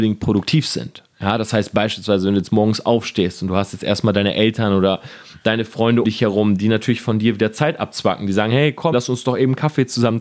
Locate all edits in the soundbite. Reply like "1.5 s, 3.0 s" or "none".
6.0 s, 8.9 s